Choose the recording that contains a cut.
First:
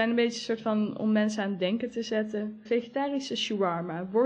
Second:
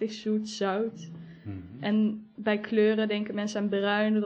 first; 1 cut; at 2.7 s

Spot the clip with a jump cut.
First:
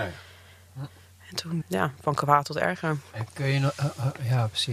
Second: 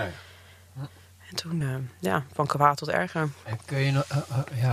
first; 1 cut; at 1.6 s

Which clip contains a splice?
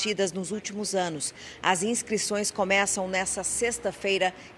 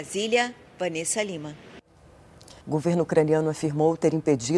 second; 1 cut; at 2.6 s

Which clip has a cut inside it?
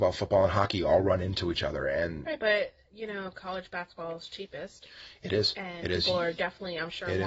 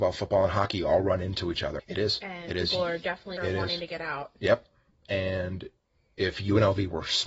second; 2 cuts; at 1.8 s, 3.4 s

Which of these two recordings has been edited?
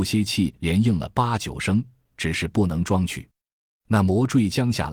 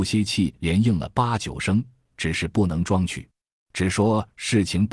second; 1 cut; at 3.6 s

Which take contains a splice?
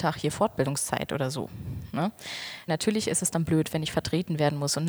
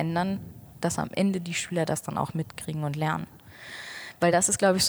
first; 1 cut; at 2.7 s

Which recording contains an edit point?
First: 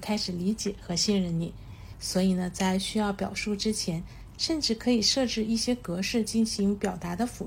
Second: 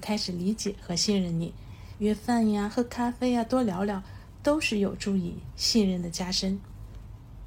first; 2 cuts; at 1.9 s, 4.3 s

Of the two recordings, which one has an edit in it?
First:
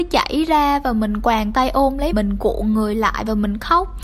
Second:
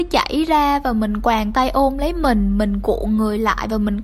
first; 1 cut; at 2.1 s

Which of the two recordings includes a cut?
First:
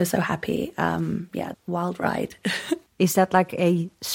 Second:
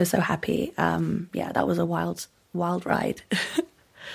first; 2 cuts; at 1.5 s, 2.9 s

